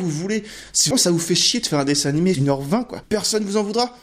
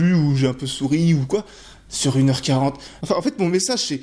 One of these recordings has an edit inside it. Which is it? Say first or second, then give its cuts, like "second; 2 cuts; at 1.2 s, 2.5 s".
first; 2 cuts; at 0.9 s, 2.3 s